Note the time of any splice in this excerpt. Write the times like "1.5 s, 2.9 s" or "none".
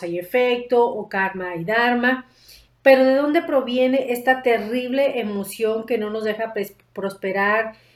2.7 s